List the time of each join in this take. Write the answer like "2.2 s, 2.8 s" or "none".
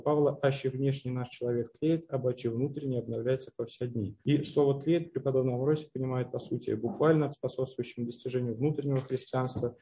4.2 s, 7.3 s